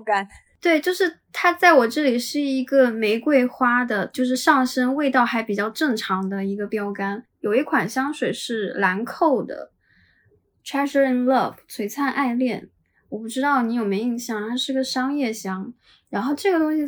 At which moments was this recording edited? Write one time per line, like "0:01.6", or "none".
none